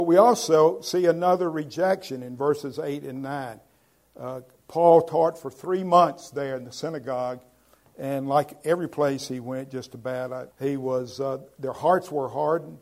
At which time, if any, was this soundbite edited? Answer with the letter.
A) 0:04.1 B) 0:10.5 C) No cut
B